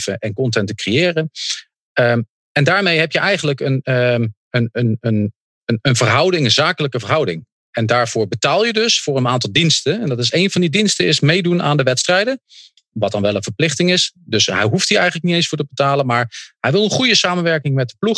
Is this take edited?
no; 0 cuts

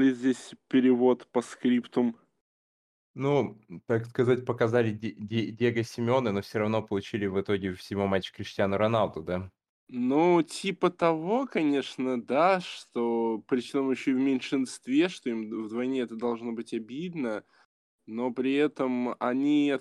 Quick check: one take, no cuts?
yes; 0 cuts

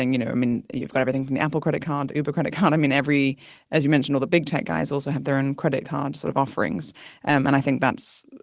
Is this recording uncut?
yes; 0 cuts

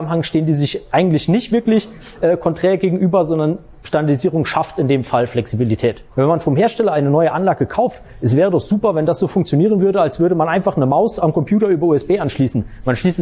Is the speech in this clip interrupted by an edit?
yes; 1 cut; at 6.1 s

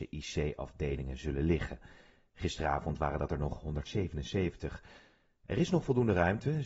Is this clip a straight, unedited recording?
yes; 0 cuts

